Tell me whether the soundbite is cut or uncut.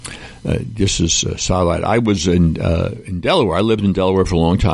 uncut